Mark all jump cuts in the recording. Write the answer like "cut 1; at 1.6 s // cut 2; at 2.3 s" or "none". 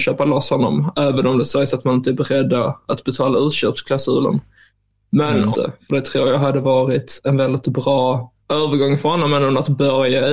cut 1; at 5.5 s // cut 2; at 8.4 s